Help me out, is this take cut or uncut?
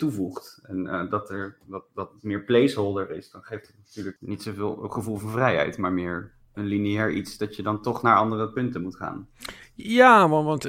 cut